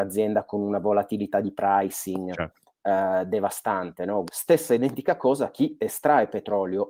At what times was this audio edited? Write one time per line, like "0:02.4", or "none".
0:04.3